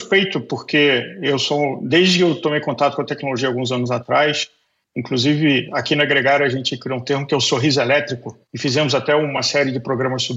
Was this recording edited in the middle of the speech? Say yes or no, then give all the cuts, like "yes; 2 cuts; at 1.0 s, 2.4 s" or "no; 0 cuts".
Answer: no; 0 cuts